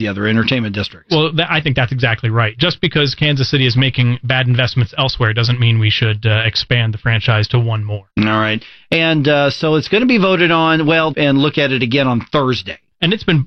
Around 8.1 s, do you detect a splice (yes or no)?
yes